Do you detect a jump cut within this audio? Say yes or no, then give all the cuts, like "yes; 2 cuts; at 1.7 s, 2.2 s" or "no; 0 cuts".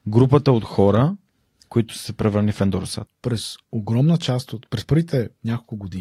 yes; 1 cut; at 3.1 s